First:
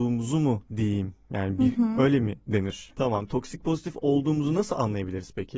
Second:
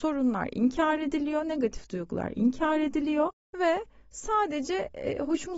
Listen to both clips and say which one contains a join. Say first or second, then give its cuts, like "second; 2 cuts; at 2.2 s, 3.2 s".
first; 1 cut; at 2.9 s